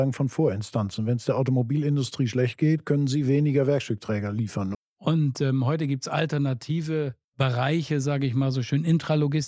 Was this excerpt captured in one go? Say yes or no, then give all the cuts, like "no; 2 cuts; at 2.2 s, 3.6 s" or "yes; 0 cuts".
no; 2 cuts; at 4.7 s, 7.2 s